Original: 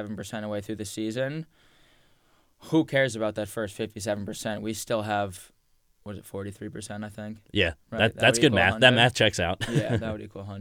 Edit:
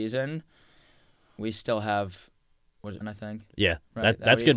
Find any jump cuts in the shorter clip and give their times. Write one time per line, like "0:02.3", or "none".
0:01.4
0:03.0